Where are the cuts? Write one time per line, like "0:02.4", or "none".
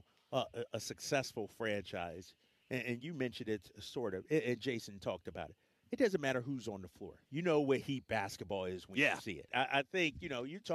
0:07.3
0:09.5